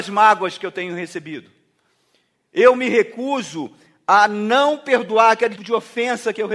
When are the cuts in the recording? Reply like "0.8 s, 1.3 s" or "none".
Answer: 5.6 s